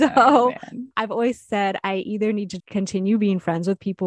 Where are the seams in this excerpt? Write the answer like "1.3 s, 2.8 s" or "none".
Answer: 0.9 s, 2.6 s